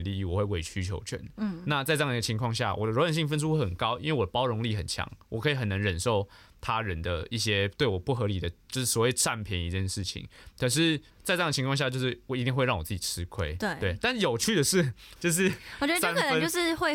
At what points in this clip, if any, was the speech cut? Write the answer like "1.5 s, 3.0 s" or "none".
11.1 s, 15.2 s